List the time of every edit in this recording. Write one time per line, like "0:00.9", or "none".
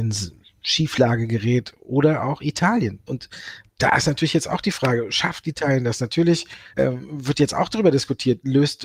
0:03.1
0:06.7